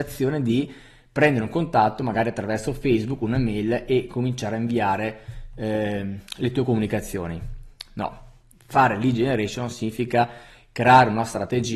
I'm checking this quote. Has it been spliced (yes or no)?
no